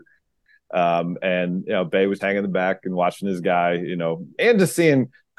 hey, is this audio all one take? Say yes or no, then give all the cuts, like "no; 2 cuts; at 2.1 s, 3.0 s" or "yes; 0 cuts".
no; 2 cuts; at 2.2 s, 4.4 s